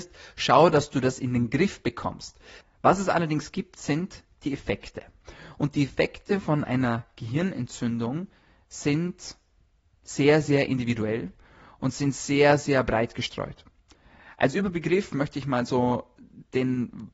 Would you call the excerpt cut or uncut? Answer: cut